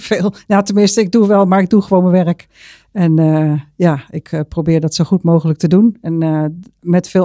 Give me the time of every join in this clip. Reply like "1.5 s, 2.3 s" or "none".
none